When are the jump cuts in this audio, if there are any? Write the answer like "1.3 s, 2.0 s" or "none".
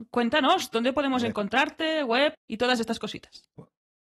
2.3 s